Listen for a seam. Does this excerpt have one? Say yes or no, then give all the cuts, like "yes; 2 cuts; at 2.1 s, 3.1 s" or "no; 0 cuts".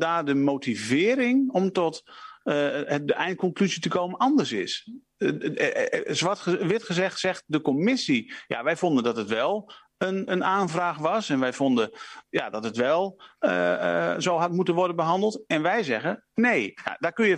yes; 1 cut; at 10.3 s